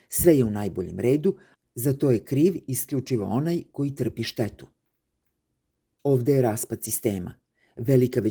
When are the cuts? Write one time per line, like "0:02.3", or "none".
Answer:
0:01.6